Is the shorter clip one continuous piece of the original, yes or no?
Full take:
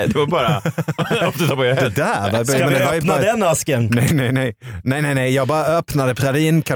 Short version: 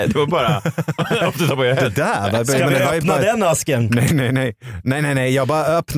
yes